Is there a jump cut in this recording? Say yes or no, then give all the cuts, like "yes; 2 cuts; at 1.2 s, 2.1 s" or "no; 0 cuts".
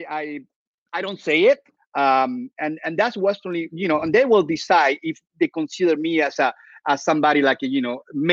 yes; 1 cut; at 1.8 s